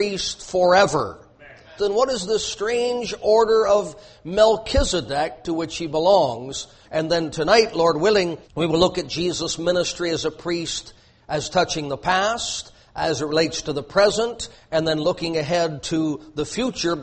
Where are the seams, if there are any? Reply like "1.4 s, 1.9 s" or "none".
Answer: 1.8 s, 6.8 s, 8.4 s